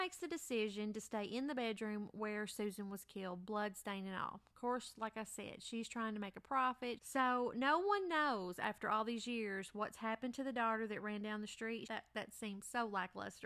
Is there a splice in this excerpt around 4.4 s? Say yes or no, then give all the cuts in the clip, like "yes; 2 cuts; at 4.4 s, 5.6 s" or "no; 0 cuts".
no; 2 cuts; at 7.0 s, 11.9 s